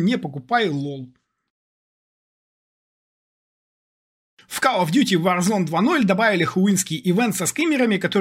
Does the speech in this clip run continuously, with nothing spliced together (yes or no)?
yes